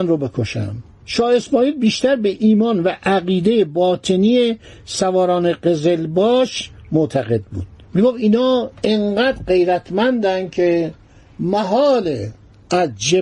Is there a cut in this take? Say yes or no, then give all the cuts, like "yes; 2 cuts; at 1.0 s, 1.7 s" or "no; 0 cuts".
no; 0 cuts